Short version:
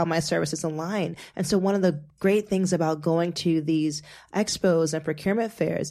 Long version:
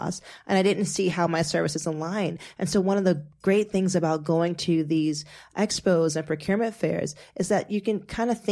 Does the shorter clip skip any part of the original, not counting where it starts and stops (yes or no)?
no